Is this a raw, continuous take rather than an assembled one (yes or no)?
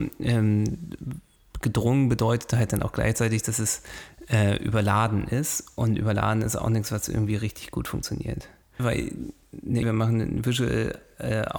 no